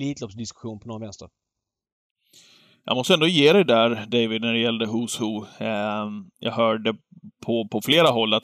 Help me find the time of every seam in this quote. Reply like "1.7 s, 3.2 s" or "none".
none